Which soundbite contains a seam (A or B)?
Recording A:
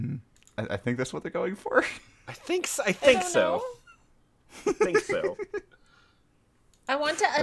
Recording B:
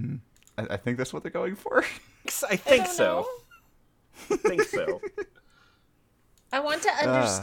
B